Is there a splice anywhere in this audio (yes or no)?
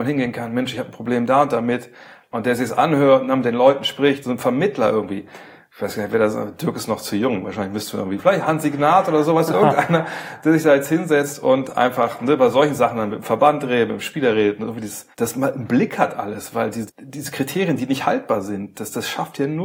yes